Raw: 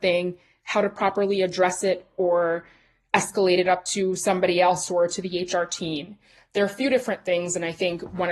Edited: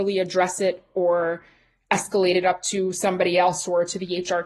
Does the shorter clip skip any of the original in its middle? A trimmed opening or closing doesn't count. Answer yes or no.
no